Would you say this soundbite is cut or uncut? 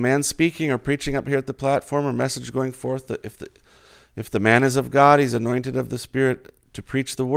uncut